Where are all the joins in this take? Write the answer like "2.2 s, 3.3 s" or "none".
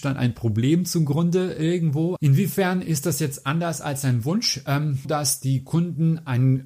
2.2 s, 5.0 s